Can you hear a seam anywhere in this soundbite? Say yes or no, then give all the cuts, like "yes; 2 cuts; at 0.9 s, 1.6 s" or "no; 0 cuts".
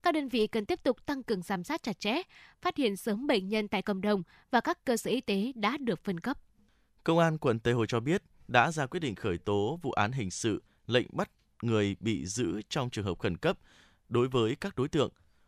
no; 0 cuts